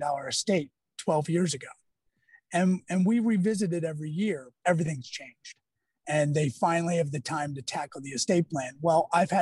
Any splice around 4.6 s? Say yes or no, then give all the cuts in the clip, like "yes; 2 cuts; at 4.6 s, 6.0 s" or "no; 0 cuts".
yes; 1 cut; at 4.6 s